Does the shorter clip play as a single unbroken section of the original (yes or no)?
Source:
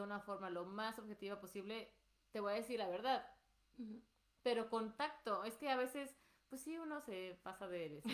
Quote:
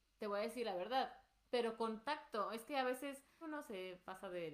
no